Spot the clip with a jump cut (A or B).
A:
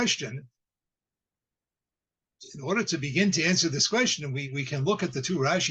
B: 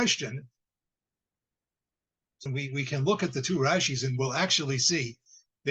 B